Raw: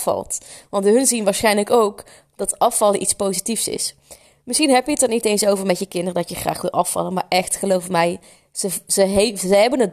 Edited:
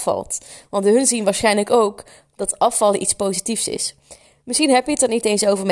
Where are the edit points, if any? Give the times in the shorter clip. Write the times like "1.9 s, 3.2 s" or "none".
none